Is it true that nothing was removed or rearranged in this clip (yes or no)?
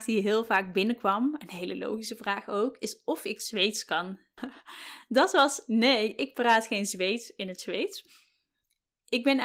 no